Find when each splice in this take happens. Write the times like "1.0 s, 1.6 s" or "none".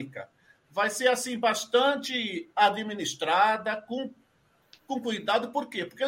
none